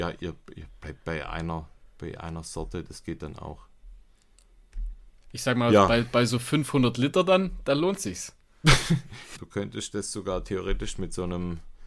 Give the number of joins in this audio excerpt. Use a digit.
2